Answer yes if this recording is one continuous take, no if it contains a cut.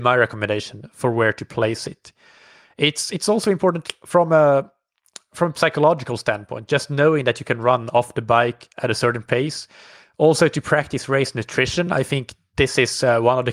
yes